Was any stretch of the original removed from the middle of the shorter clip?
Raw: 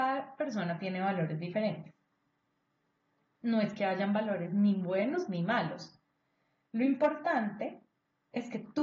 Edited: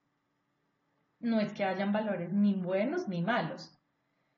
no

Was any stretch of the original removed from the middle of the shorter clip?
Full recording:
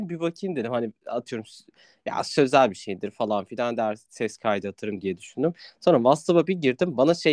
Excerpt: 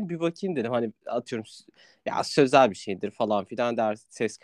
no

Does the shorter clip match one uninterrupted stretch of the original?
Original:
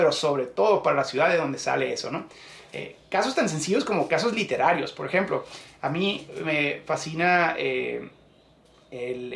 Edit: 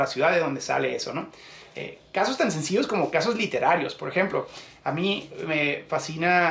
yes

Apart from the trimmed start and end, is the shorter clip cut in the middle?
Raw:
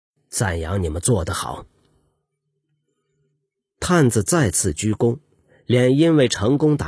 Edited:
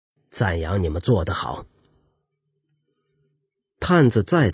no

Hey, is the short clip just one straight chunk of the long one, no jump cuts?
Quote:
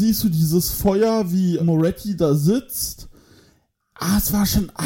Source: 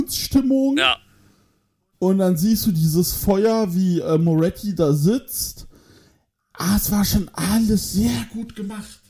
no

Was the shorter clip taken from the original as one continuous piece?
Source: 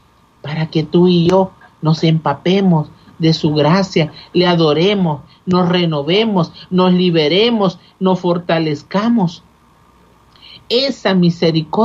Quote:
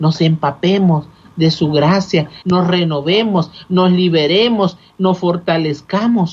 no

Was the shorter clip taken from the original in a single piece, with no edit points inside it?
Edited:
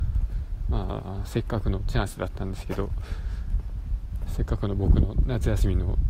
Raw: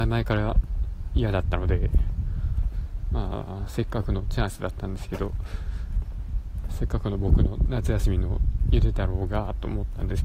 yes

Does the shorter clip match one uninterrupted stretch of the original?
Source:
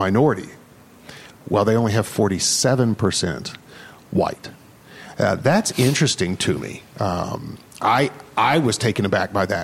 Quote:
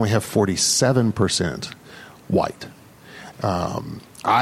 no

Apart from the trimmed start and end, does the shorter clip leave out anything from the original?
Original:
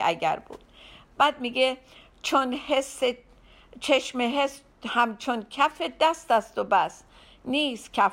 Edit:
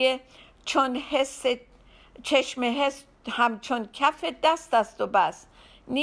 no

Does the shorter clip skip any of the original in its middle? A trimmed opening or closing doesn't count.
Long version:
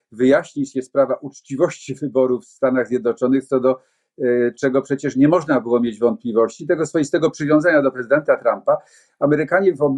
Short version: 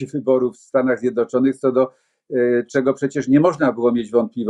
no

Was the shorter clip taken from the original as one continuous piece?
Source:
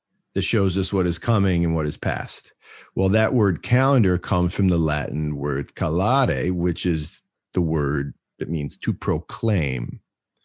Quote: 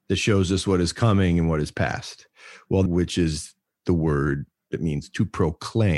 no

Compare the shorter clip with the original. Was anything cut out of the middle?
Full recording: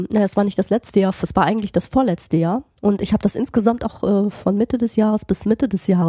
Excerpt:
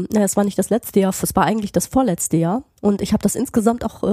no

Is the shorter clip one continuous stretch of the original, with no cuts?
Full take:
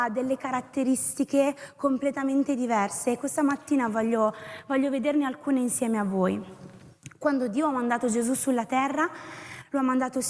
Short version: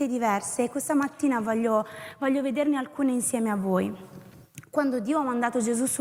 yes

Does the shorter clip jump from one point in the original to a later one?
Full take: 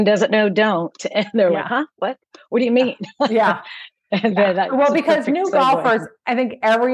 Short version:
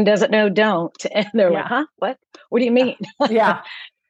no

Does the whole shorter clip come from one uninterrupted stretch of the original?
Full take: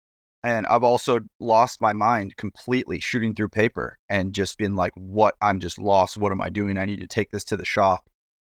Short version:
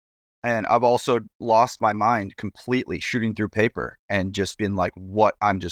yes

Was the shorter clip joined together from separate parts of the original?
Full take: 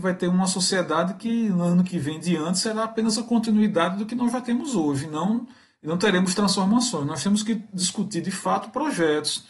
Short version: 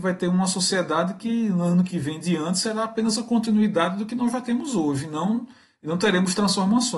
no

